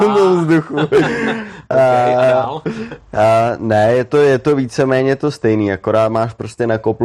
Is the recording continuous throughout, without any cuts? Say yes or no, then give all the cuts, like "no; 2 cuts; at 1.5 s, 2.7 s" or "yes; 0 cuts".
yes; 0 cuts